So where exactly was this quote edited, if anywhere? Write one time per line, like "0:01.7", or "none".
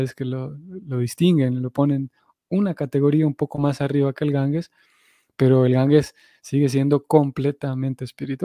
none